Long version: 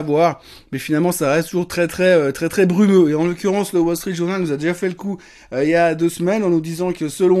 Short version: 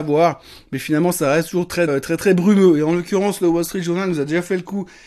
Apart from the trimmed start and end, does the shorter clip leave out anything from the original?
yes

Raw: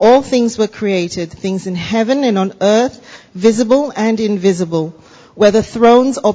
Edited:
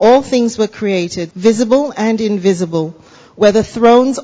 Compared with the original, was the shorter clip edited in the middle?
yes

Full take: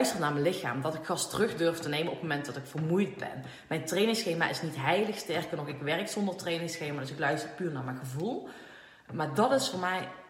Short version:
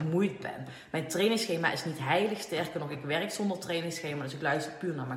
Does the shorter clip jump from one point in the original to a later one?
no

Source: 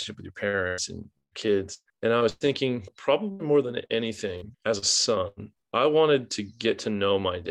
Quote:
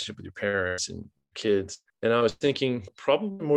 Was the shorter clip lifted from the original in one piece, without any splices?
yes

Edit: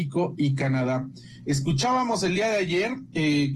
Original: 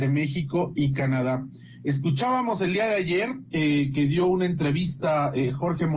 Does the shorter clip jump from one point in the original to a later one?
no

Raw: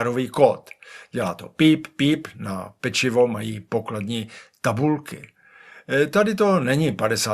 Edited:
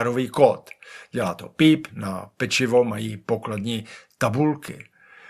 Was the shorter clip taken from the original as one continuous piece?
no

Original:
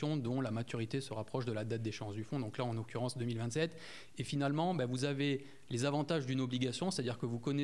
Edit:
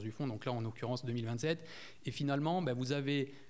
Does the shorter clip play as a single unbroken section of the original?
yes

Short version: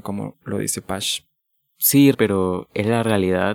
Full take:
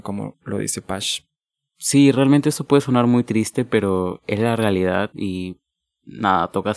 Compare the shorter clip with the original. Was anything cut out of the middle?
yes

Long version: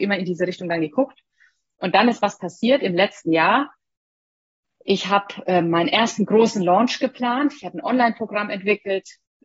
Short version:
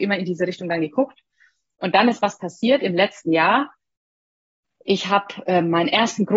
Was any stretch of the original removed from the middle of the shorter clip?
no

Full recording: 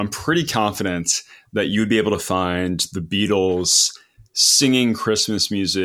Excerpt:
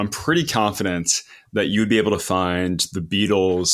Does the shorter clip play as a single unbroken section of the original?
yes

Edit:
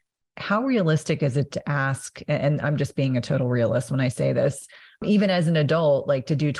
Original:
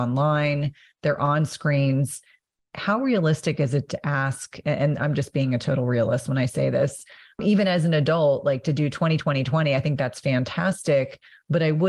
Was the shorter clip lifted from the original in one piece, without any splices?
yes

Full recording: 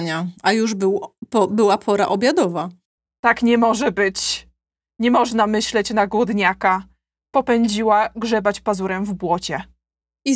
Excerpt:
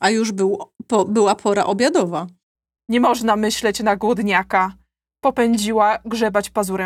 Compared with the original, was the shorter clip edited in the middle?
yes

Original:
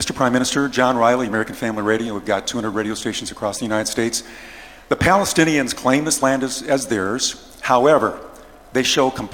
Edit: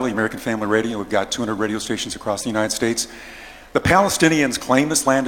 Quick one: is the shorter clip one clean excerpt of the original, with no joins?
yes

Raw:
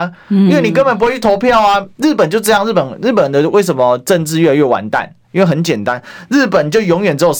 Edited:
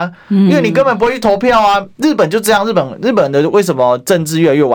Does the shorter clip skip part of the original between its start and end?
no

